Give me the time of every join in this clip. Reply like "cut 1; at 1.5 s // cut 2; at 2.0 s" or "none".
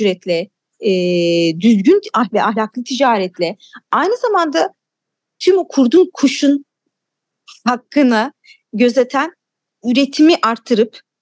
none